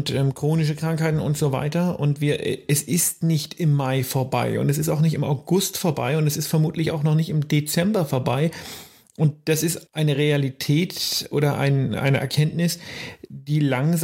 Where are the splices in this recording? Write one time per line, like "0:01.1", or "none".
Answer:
0:09.9

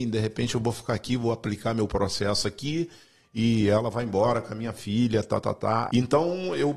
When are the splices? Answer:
0:05.9

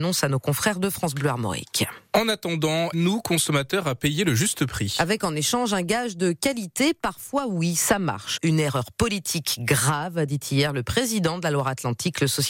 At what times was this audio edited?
0:02.9
0:08.4

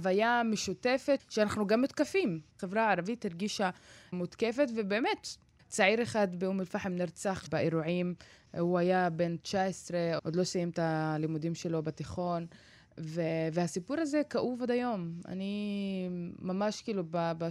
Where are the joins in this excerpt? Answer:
0:02.5

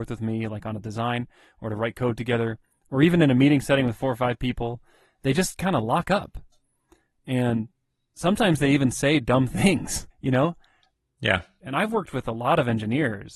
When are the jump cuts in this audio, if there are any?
0:10.1
0:11.6

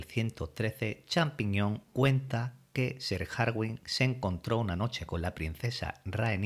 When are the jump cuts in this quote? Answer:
0:01.8

